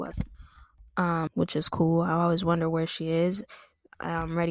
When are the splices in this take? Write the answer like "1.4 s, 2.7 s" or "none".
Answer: 1.3 s